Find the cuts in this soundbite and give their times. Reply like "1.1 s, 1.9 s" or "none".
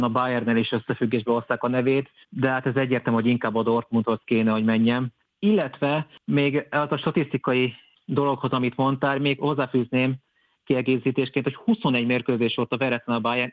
5.2 s